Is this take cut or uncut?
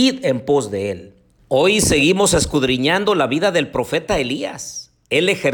cut